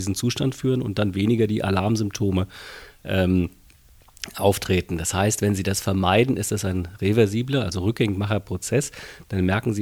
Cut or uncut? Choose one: uncut